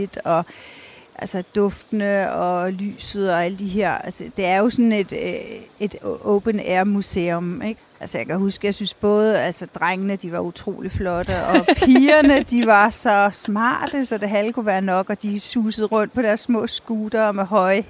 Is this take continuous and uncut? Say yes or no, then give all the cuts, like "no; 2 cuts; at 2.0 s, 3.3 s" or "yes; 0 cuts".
no; 1 cut; at 7.8 s